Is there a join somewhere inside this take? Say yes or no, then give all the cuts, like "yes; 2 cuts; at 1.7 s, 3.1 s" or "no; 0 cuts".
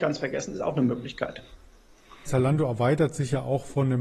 yes; 1 cut; at 2.3 s